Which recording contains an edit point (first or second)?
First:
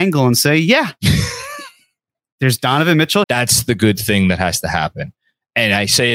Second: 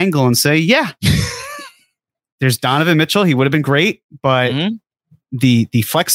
first